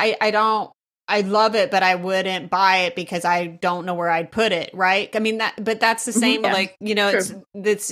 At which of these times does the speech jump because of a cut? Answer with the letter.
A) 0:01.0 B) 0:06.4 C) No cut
B